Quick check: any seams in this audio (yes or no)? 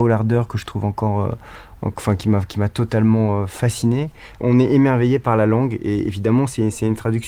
no